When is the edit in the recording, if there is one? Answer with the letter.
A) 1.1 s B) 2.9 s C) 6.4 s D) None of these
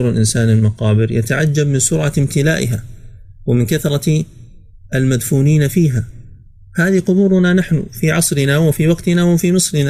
D